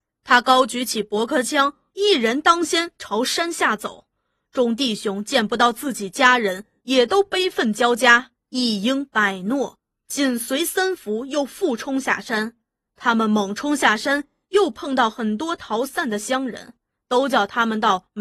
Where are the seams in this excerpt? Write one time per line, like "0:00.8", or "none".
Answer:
none